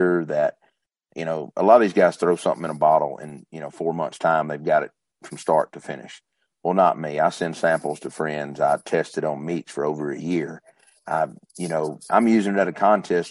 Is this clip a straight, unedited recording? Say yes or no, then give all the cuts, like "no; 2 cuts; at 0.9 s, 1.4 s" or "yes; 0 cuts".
yes; 0 cuts